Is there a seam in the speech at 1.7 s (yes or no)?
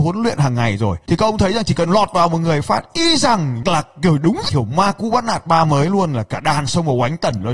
no